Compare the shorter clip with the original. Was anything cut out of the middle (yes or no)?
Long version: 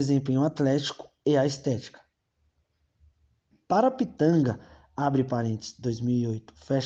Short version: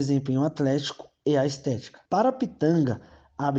yes